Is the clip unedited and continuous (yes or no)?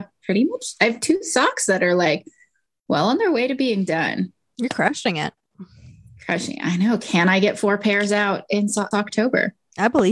no